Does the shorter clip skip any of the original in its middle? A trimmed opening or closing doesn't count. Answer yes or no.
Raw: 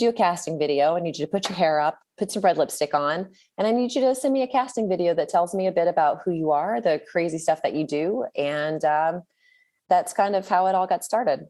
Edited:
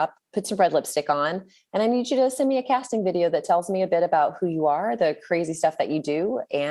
no